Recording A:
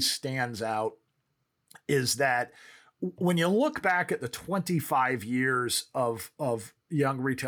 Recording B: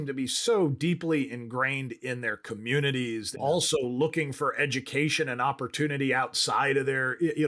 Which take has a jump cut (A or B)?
B